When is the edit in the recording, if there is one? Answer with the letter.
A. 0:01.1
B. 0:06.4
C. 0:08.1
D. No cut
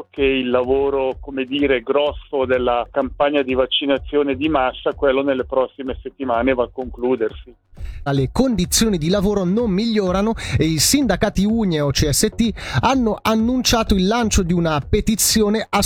C